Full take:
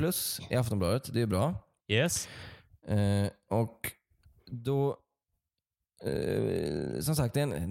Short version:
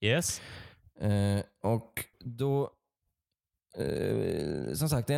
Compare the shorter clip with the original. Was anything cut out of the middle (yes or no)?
yes